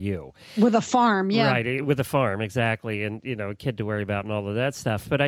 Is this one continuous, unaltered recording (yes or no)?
yes